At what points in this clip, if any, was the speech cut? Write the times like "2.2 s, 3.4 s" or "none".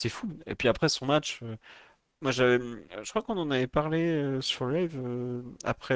none

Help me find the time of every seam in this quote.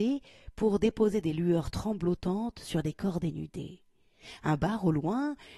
none

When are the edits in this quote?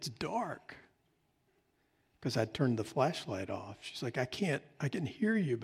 none

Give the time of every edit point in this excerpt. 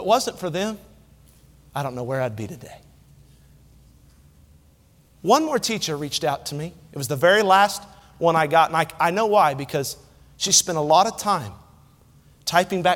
none

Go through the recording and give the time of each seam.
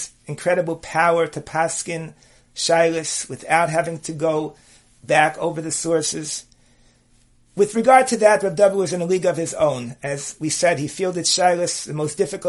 none

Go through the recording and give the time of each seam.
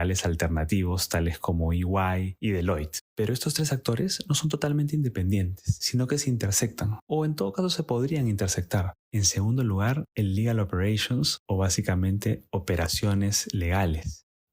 3.1 s, 8.9 s

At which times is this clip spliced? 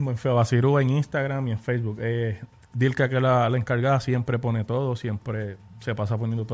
none

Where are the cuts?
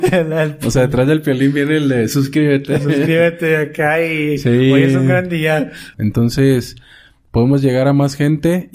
5.9 s

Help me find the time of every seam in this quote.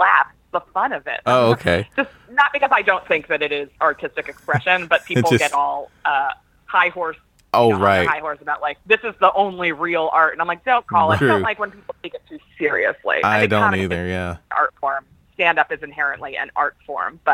1.2 s, 11.2 s

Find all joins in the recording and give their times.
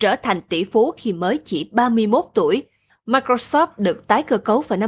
2.9 s

